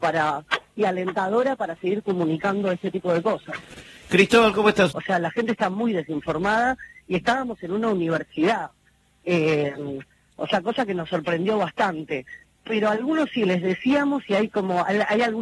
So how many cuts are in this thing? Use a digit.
1